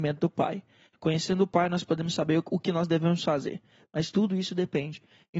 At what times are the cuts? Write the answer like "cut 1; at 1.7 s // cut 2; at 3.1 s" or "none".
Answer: cut 1; at 0.9 s